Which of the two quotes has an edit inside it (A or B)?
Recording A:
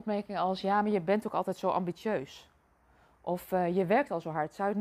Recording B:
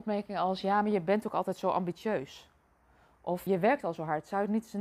B